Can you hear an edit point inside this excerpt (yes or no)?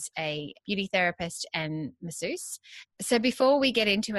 yes